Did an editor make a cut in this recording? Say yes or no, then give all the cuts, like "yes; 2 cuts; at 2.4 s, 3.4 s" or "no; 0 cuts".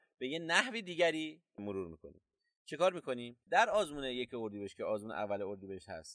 yes; 1 cut; at 3.4 s